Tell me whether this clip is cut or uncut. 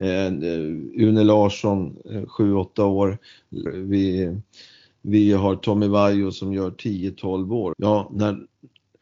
cut